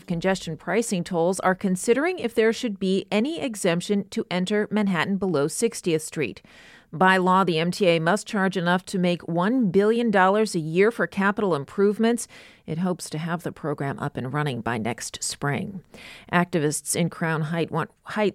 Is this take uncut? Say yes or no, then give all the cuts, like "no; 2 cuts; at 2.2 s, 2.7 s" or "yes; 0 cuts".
no; 1 cut; at 6.8 s